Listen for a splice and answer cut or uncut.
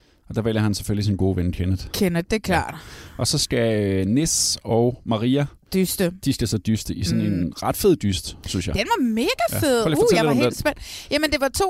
uncut